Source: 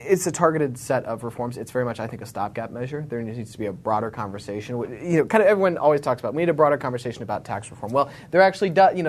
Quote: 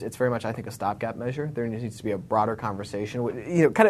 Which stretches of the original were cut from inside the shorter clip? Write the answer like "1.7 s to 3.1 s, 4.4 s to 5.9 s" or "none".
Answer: none